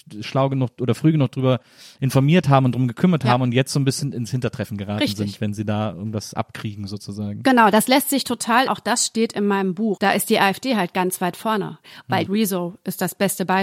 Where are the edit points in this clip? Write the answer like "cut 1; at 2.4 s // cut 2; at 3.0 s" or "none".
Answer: cut 1; at 8.7 s // cut 2; at 10.0 s // cut 3; at 12.3 s